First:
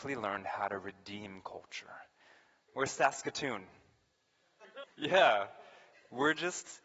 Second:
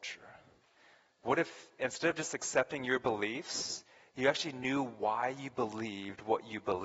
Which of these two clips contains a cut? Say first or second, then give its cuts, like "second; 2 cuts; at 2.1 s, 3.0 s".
first; 2 cuts; at 2.7 s, 4.8 s